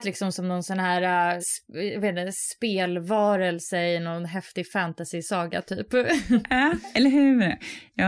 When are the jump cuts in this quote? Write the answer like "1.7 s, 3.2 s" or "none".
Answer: 1.4 s